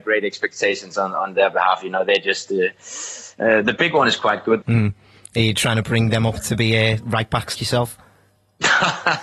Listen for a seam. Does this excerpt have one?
yes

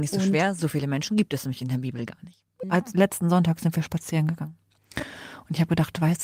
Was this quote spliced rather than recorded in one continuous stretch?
yes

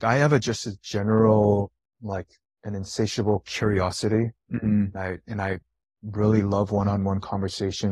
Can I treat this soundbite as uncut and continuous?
yes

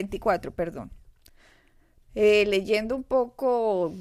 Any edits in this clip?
yes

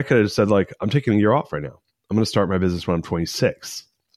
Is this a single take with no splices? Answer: yes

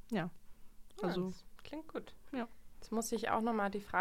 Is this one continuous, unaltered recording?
yes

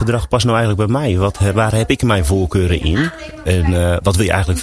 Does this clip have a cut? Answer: yes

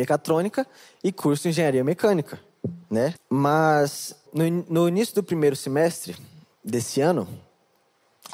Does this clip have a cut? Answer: yes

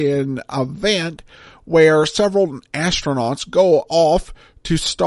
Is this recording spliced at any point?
no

